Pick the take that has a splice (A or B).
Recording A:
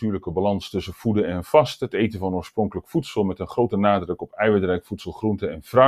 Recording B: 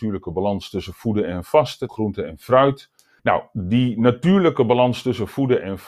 B